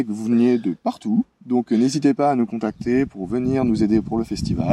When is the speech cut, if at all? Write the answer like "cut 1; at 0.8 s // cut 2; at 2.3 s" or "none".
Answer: cut 1; at 1.3 s